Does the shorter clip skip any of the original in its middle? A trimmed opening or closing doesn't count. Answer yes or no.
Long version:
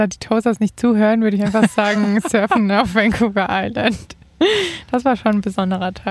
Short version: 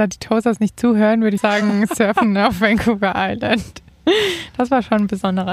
yes